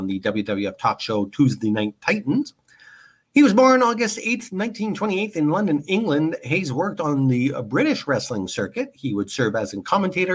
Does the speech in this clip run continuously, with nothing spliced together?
yes; 0 cuts

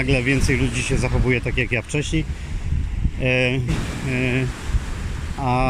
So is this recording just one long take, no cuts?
no; 1 cut; at 3.7 s

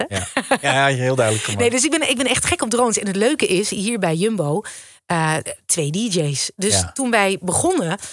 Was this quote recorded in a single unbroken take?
yes; 0 cuts

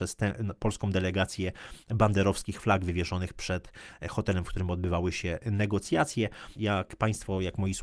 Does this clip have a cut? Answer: yes; 1 cut; at 6.5 s

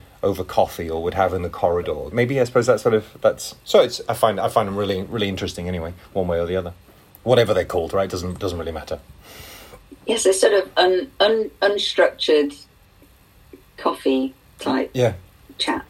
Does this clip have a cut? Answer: yes; 1 cut; at 2.1 s

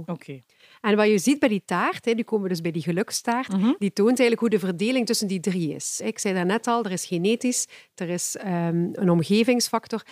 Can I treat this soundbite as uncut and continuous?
yes; 0 cuts

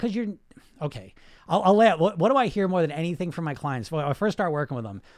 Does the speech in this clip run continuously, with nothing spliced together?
yes; 0 cuts

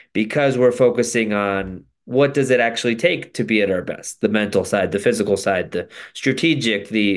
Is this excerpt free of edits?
yes; 0 cuts

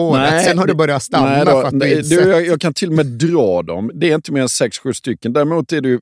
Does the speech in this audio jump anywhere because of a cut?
no; 0 cuts

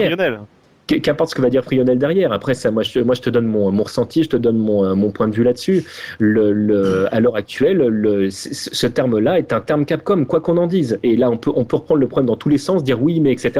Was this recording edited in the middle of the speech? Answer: no; 0 cuts

